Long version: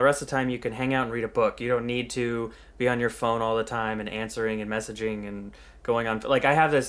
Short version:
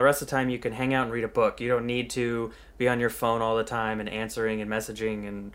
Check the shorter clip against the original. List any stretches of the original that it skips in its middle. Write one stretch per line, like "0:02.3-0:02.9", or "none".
none